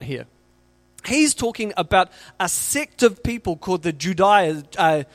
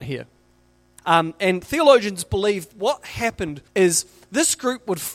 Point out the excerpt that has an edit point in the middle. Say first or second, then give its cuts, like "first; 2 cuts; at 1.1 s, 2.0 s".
second; 2 cuts; at 1.0 s, 3.7 s